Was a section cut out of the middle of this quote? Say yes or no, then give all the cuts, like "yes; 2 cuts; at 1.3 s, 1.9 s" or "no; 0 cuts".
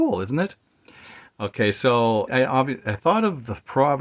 yes; 1 cut; at 2.3 s